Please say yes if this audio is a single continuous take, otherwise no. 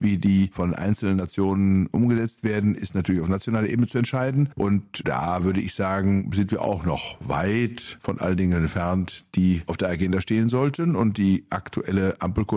yes